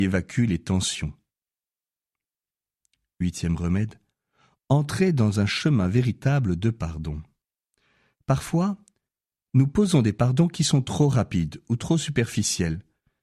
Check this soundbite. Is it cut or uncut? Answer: uncut